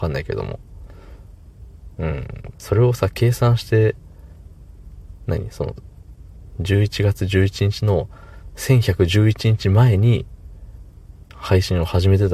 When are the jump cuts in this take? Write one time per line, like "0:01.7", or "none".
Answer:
0:02.5